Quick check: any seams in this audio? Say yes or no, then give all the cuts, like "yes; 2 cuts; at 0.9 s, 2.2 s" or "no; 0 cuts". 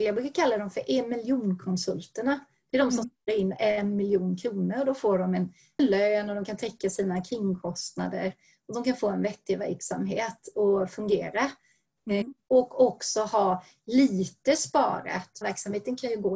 yes; 1 cut; at 15.4 s